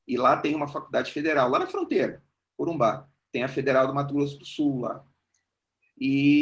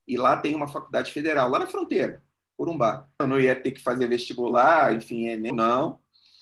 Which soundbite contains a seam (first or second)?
second